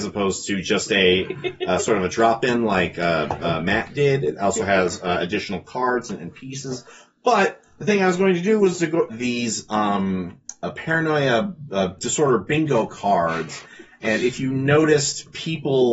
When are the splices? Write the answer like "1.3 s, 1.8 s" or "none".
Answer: 9.1 s, 12.0 s